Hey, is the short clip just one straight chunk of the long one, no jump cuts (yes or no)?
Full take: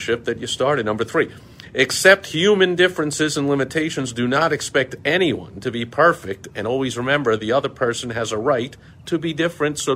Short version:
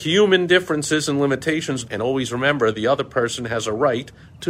no